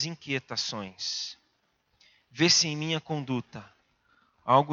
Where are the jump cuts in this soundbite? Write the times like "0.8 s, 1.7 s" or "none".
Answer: none

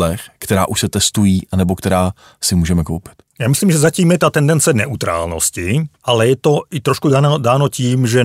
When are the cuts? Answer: none

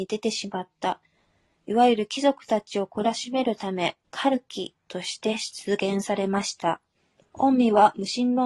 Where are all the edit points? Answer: 4.0 s, 7.2 s

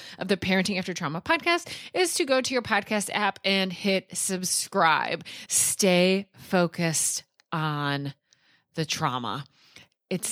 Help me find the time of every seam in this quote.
5.5 s

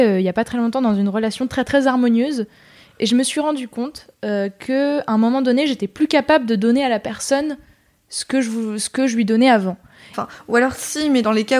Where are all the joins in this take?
10.1 s

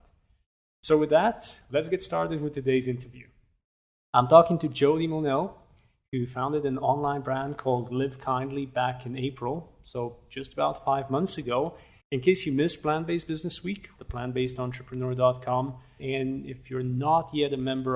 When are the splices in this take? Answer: 12.0 s, 14.0 s, 16.0 s

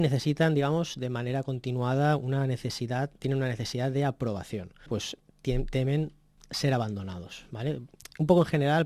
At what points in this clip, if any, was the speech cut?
4.9 s

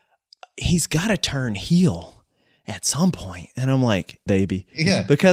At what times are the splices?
4.3 s

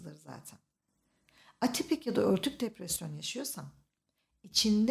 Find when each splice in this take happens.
none

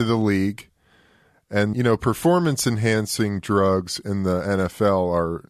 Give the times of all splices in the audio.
1.7 s

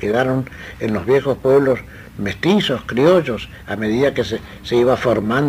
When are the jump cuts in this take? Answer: none

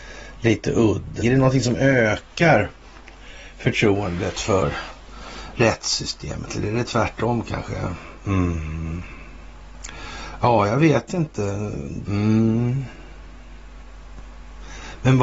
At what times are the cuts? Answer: 1.2 s, 12.0 s

